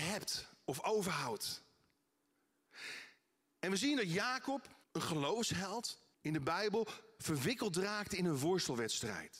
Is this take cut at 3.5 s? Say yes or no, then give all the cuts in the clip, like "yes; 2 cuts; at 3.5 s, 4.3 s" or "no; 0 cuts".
no; 2 cuts; at 4.8 s, 6.1 s